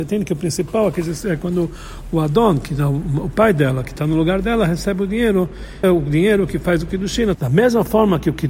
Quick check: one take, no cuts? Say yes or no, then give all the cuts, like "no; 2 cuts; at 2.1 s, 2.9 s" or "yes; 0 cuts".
no; 2 cuts; at 5.8 s, 7.3 s